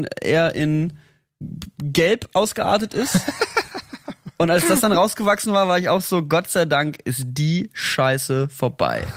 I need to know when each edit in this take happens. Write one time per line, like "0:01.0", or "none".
none